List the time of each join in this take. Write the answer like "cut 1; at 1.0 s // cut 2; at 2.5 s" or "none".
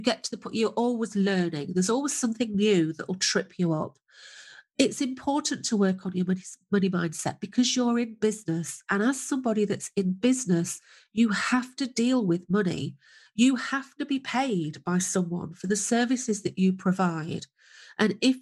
none